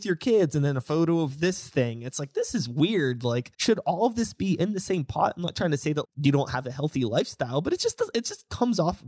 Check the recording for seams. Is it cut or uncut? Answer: cut